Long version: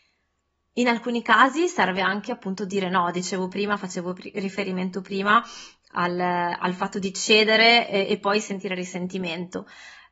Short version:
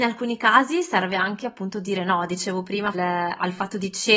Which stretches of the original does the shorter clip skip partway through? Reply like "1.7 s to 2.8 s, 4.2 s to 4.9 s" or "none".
3.8 s to 6.2 s